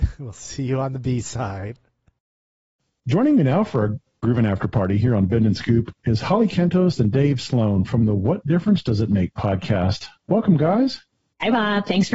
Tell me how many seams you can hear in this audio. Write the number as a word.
zero